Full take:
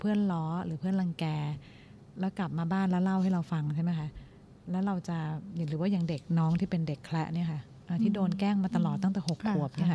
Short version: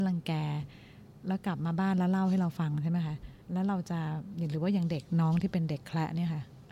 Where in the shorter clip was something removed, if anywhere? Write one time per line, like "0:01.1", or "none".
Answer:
0:03.4

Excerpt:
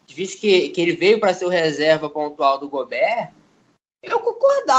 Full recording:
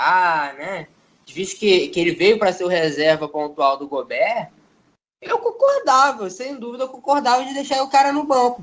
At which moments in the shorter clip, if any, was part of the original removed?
none

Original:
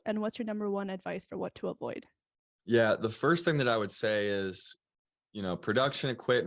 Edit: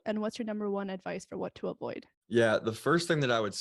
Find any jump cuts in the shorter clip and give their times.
0:02.1

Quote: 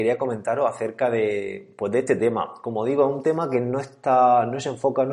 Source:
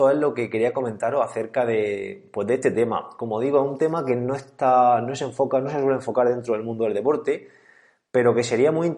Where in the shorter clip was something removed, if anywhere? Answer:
none

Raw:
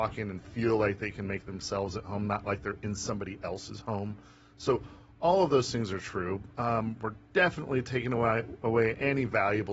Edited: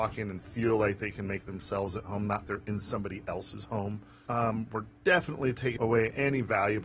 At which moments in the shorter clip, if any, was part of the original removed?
0:02.4
0:04.3
0:05.8

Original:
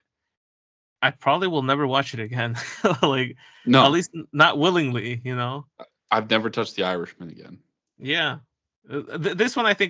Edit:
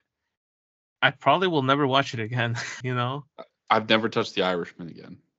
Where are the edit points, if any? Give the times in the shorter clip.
0:02.8

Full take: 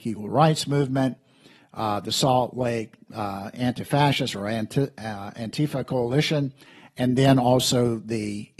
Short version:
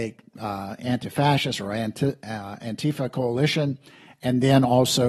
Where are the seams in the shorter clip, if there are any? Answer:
none

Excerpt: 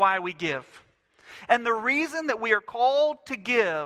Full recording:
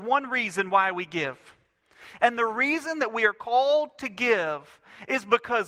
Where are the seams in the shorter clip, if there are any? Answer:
none

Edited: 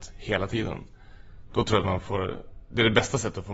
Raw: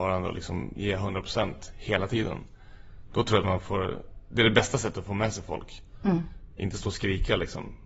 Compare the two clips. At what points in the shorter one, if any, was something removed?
none

